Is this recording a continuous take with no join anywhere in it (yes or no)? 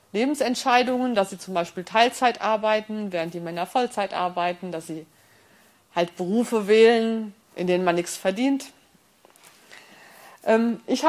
no